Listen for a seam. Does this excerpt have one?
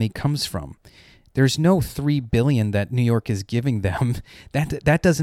no; 0 cuts

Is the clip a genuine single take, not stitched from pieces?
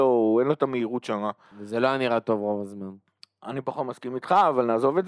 no; 1 cut; at 1.5 s

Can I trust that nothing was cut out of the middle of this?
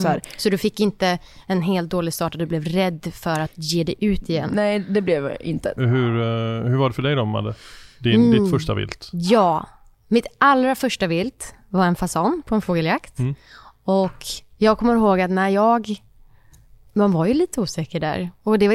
yes; 0 cuts

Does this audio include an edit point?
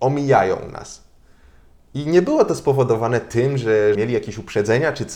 yes; 1 cut; at 4.0 s

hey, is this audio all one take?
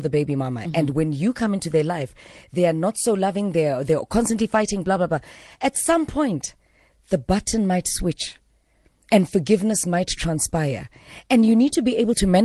yes; 0 cuts

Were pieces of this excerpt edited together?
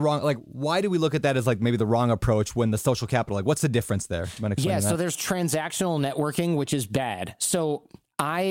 no; 0 cuts

